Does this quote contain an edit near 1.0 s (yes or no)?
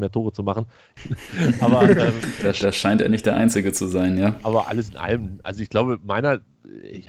yes